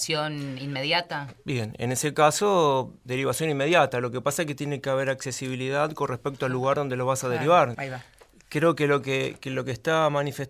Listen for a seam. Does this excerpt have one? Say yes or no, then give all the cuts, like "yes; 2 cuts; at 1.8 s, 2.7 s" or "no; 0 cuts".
yes; 2 cuts; at 3.1 s, 7.7 s